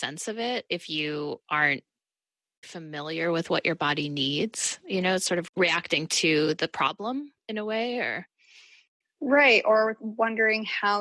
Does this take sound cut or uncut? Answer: cut